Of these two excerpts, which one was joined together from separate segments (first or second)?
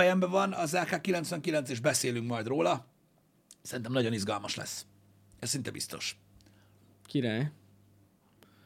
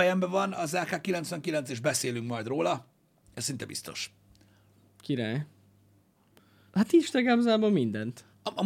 second